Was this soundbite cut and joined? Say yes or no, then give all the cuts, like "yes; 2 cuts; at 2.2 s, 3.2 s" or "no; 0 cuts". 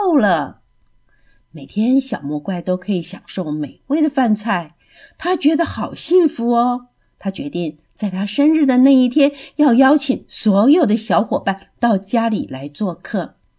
no; 0 cuts